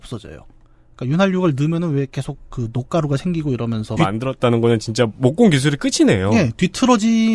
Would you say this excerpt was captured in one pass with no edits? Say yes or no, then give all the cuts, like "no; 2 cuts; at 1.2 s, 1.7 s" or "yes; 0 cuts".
no; 1 cut; at 4.0 s